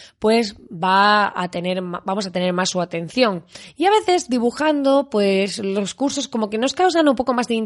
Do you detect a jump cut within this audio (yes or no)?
no